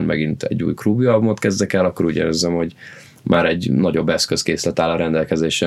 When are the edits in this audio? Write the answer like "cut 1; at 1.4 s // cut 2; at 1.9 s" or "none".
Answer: none